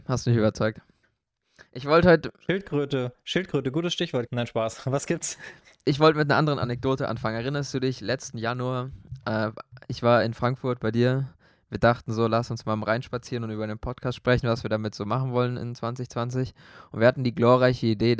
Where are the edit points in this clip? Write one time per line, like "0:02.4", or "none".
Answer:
0:04.3